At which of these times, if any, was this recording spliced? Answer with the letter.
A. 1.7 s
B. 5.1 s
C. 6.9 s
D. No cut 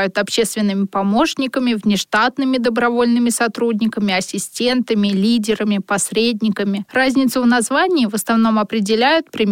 D